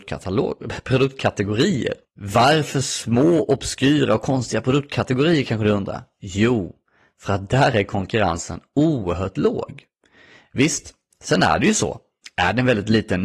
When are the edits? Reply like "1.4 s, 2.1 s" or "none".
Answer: none